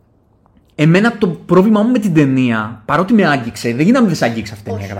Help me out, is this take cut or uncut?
uncut